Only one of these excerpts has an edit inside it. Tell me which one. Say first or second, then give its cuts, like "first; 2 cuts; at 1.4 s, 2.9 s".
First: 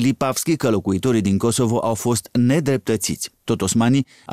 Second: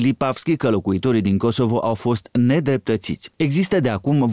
second; 1 cut; at 3.3 s